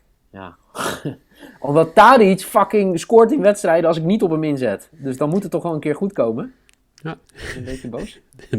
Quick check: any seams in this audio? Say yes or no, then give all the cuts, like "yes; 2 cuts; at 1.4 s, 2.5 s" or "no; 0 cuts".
yes; 1 cut; at 7.2 s